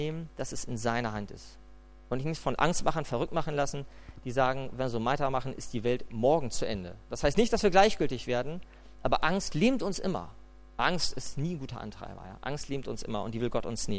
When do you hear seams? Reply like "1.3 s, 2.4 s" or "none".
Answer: none